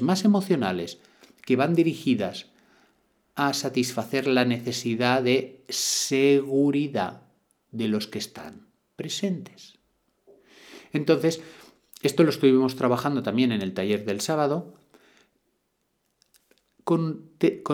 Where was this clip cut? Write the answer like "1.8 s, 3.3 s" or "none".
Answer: none